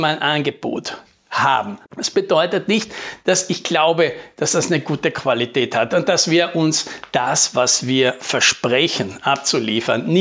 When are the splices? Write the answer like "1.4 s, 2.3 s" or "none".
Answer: 1.8 s